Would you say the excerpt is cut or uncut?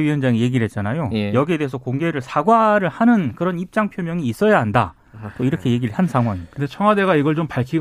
uncut